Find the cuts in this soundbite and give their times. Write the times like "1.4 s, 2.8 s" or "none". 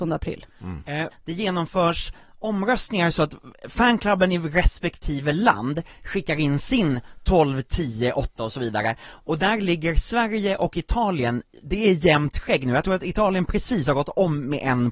1.1 s